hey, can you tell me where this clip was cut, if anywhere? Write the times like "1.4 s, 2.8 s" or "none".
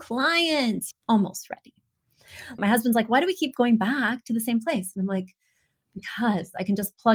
0.9 s, 2.6 s